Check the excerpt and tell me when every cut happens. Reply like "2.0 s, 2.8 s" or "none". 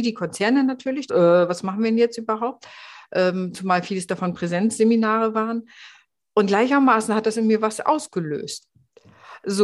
1.1 s